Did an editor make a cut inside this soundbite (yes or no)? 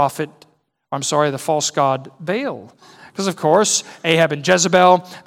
no